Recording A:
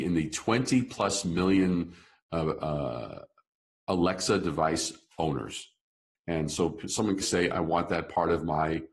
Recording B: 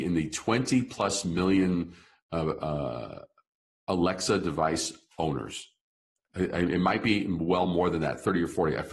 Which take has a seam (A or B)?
A